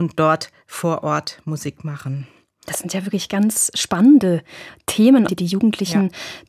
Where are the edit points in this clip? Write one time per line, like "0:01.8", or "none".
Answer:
0:05.3